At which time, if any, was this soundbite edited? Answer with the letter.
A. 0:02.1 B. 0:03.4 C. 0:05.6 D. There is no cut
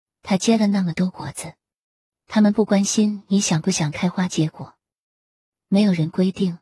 A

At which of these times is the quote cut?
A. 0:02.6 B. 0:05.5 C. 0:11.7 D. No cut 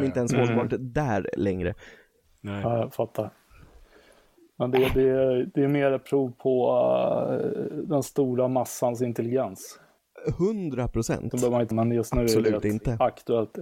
C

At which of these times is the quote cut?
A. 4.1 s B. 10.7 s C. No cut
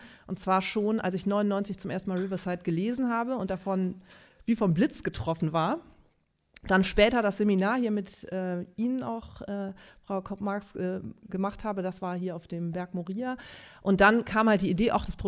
C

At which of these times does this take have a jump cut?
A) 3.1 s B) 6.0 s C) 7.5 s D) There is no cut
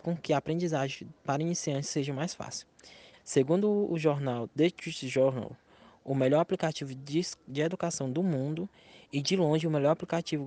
A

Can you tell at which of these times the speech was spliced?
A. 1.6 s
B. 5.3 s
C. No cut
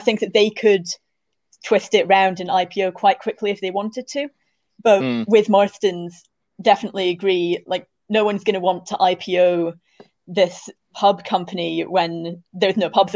C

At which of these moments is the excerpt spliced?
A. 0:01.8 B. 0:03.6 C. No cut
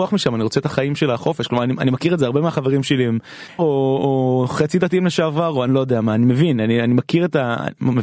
B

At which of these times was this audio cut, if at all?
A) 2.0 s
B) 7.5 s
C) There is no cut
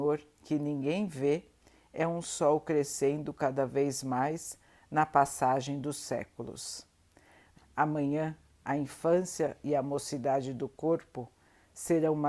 B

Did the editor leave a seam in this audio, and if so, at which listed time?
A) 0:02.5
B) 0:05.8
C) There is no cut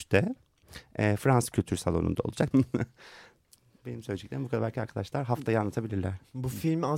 A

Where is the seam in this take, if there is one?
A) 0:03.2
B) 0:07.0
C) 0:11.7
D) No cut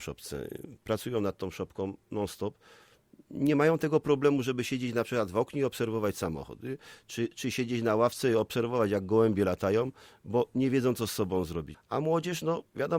C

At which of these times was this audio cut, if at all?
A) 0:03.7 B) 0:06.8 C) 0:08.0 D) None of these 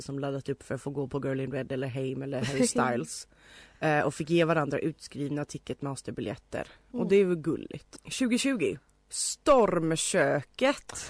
C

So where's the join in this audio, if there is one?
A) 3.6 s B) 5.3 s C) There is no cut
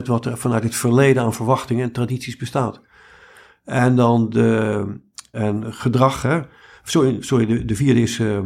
B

